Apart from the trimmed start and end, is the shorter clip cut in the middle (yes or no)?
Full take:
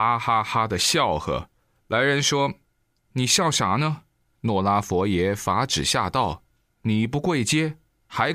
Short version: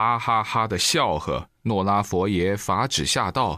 yes